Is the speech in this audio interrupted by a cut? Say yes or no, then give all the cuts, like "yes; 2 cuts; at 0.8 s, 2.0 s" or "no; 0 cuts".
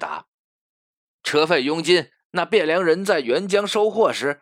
no; 0 cuts